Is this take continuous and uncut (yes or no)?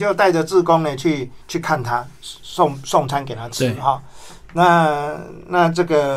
no